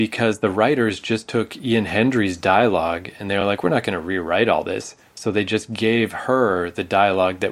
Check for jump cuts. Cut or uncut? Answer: uncut